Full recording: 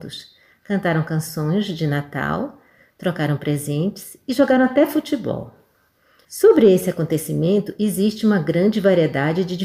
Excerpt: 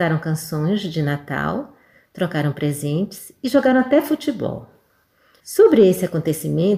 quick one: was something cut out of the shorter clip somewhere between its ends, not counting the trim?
no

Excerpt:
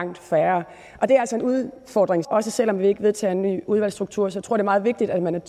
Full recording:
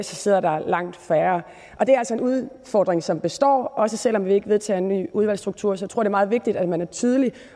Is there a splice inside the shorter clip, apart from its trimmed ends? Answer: yes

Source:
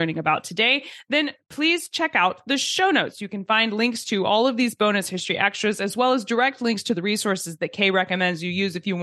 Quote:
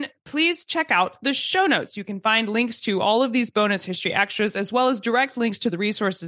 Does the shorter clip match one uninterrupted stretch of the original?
yes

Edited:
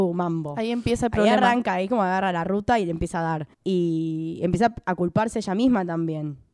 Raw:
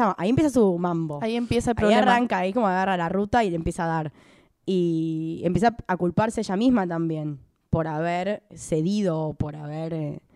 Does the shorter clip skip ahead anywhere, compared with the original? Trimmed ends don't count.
yes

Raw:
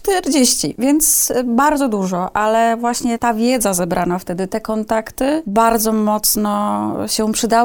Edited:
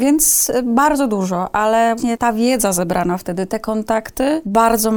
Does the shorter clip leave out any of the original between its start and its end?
yes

